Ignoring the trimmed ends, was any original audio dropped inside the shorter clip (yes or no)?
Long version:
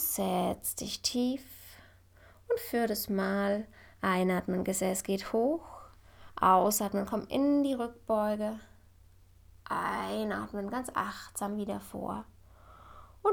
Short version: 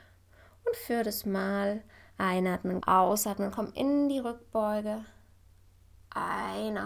yes